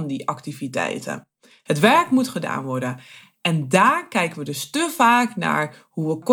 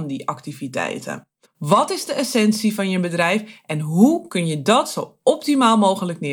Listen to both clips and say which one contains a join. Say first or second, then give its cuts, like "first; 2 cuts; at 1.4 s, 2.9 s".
second; 1 cut; at 1.4 s